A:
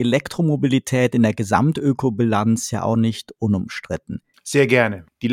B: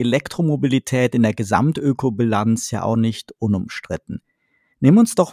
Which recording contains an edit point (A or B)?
A